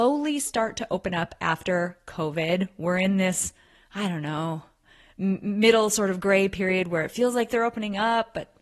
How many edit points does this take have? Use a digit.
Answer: 0